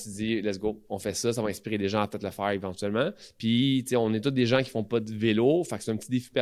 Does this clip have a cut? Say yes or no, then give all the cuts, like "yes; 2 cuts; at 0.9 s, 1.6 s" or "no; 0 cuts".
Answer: no; 0 cuts